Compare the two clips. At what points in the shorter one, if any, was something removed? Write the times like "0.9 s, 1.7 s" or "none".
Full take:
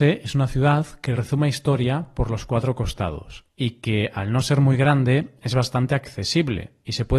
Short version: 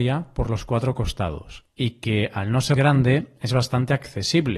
2.7 s